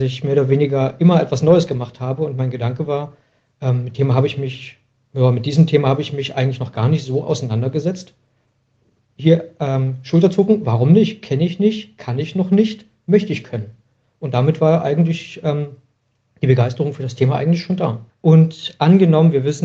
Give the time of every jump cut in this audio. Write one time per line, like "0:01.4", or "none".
0:18.1